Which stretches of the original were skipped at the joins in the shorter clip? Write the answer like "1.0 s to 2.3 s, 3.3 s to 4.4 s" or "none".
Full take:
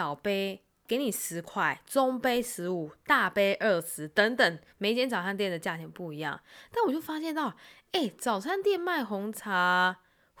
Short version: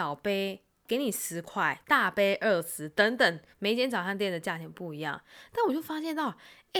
1.8 s to 3.0 s